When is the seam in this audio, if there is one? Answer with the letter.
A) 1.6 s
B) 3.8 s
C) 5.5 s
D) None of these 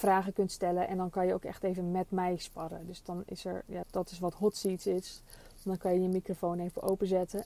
B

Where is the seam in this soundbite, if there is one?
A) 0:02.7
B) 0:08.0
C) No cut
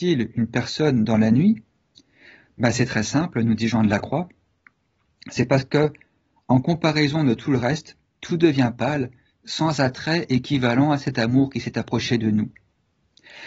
C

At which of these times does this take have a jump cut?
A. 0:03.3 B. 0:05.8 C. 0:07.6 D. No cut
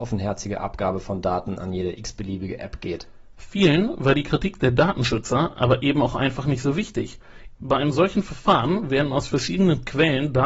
C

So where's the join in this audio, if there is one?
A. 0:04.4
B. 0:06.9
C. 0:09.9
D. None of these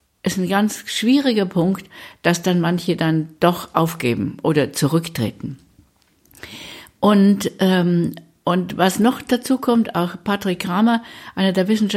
D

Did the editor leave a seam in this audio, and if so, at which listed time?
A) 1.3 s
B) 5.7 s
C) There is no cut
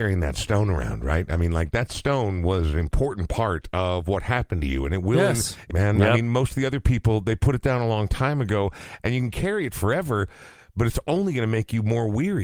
B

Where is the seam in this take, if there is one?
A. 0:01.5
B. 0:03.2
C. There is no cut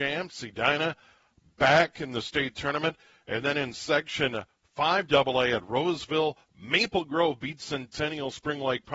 C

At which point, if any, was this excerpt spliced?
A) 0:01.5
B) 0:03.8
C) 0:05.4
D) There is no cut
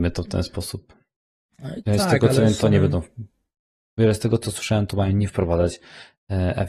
D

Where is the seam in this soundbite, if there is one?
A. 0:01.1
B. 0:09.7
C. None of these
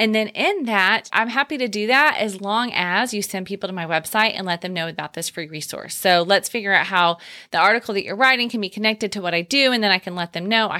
A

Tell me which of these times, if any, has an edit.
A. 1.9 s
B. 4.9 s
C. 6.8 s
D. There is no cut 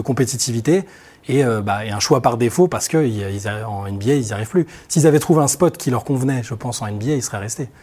D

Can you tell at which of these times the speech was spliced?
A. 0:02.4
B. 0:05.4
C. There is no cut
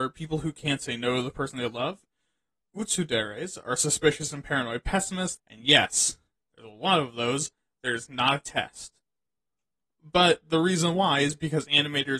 B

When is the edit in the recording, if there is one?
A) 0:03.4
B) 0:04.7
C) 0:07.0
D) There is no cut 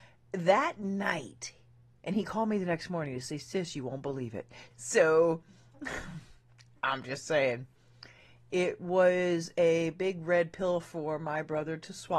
B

